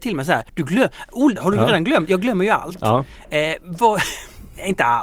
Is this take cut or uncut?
cut